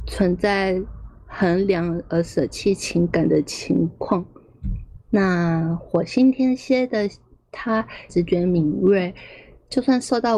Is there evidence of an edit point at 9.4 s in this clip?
no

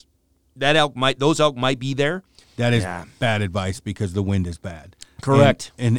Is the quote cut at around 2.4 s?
yes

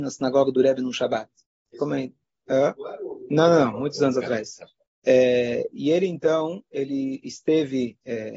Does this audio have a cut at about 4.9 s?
yes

